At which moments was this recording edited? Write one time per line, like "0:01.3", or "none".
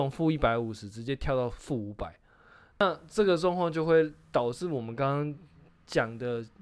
0:02.7